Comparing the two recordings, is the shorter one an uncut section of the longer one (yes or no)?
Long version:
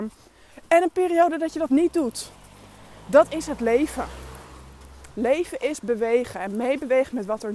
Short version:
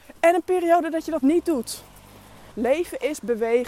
no